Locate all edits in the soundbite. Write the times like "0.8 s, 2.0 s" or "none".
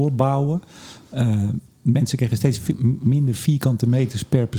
none